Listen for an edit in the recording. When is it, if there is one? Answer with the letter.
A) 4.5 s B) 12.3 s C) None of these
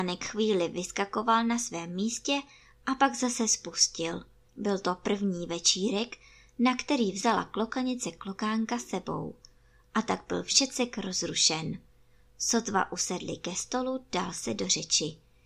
A